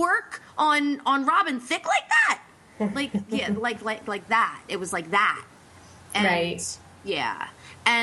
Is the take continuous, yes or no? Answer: yes